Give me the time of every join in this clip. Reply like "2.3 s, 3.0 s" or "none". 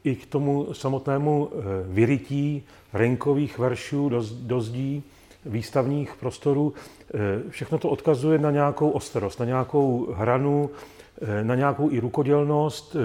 none